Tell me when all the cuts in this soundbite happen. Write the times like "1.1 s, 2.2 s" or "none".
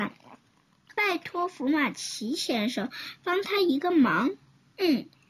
1.0 s